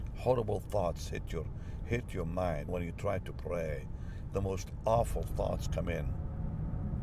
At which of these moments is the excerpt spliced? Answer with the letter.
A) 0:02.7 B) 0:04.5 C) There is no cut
A